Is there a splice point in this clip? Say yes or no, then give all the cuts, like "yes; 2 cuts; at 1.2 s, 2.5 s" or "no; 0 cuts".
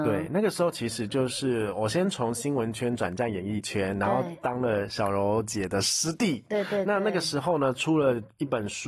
no; 0 cuts